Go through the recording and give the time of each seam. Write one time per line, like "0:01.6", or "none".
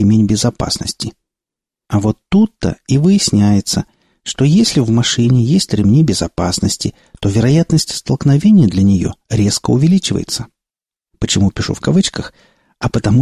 0:01.8
0:11.1

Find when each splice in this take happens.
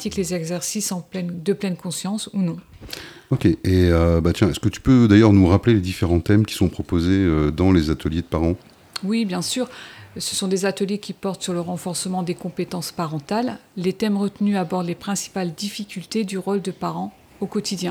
none

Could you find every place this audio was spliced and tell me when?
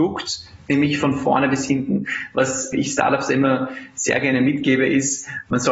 0:02.7

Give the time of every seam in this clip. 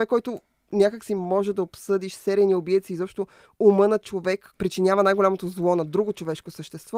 0:04.5

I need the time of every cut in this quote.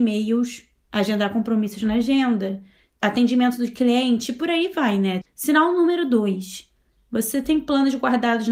0:05.2

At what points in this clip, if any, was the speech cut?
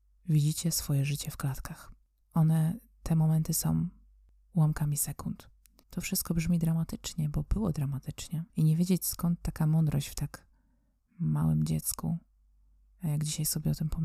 0:05.8
0:08.5

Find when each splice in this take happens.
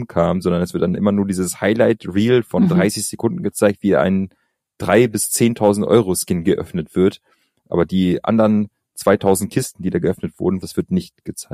0:10.6

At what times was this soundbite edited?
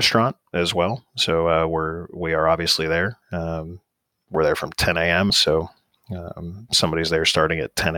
0:05.3

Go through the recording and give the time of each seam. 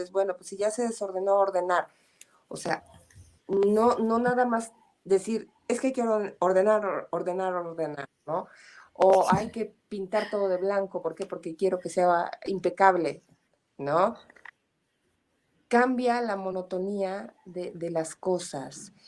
none

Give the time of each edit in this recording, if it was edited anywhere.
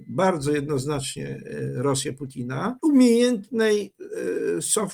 0:02.8

